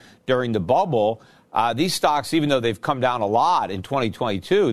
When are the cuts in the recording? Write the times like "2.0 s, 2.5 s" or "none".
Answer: none

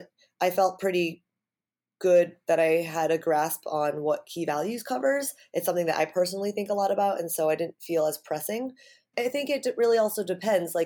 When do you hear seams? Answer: 9.1 s

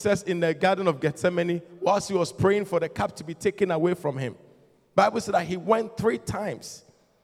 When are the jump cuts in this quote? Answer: none

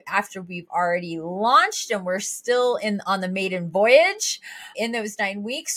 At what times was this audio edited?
4.7 s

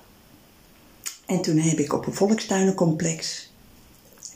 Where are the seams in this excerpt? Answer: none

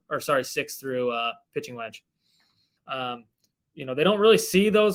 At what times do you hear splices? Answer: 2.8 s

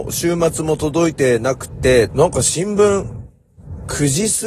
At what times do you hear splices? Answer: 2.1 s

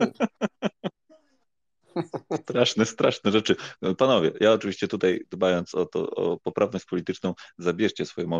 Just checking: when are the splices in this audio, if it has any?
none

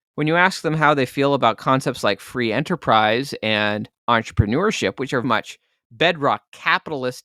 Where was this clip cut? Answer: 5.2 s

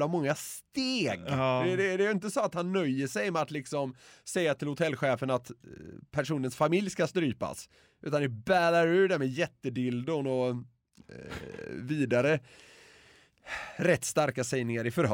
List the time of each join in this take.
none

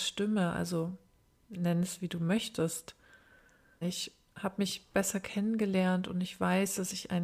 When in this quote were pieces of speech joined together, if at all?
3.8 s

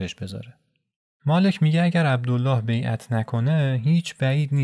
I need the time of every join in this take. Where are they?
none

